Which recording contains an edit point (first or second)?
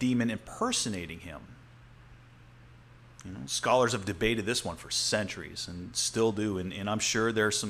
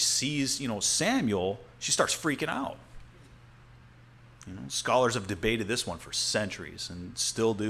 second